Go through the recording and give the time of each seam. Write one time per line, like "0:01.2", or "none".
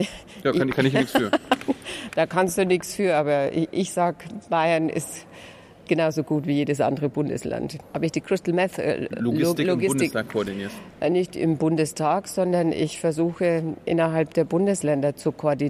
0:07.8

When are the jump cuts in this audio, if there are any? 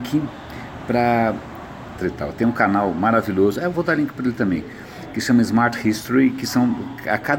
0:02.0

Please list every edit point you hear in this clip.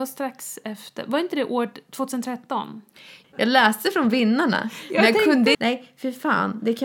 0:03.2
0:05.5

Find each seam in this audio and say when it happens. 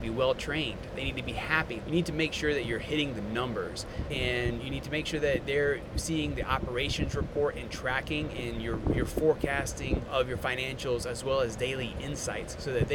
0:01.8
0:04.1

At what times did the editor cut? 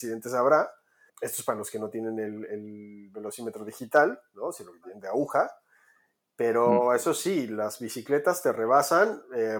0:01.1

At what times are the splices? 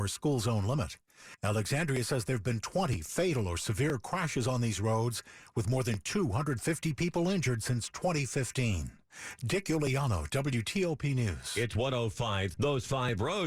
0:12.5

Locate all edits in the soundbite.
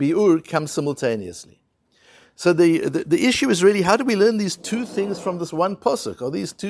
0:03.0

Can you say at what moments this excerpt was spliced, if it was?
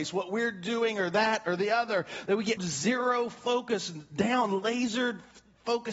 0:02.6

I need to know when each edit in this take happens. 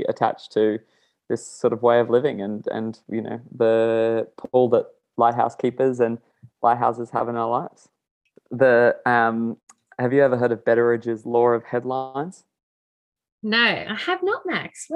0:08.4

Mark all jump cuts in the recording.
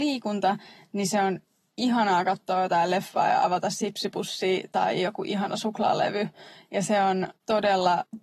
none

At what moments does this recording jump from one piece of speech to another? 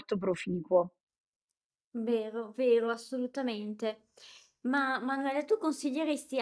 none

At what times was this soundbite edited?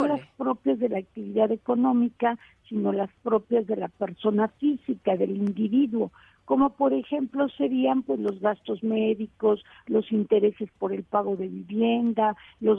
none

